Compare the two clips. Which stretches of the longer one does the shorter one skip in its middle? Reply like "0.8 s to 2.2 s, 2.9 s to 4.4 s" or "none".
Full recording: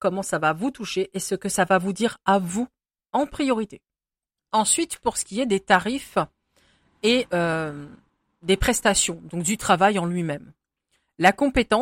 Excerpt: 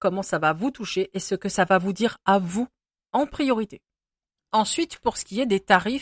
none